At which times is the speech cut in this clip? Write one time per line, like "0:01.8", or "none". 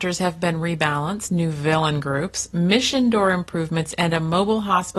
0:01.3